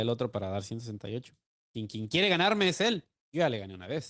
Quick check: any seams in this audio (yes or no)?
no